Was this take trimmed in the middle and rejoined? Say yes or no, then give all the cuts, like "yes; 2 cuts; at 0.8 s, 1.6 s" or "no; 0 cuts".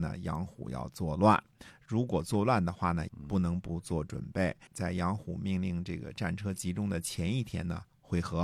yes; 2 cuts; at 3.1 s, 4.7 s